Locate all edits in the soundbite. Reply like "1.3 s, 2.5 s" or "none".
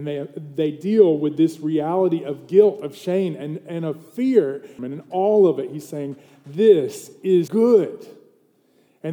4.8 s, 7.5 s